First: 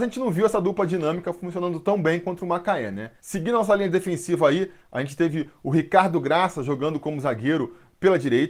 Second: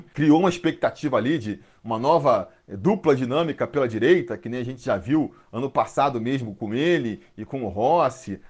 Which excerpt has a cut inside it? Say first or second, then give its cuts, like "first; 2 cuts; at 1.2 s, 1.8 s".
first; 1 cut; at 3.2 s